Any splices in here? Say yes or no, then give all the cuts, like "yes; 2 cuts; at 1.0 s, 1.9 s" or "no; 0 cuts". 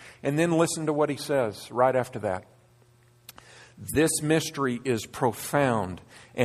no; 0 cuts